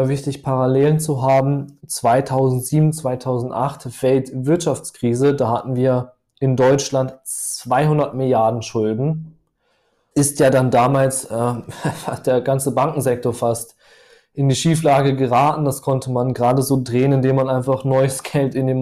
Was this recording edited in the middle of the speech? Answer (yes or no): yes